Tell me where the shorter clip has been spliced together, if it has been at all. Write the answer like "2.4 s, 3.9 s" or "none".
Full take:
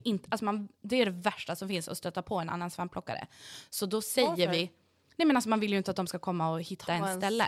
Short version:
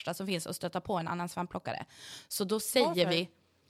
none